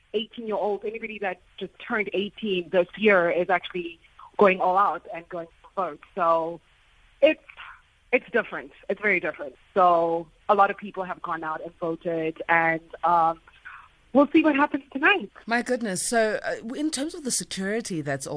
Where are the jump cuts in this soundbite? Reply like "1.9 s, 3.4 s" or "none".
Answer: 15.4 s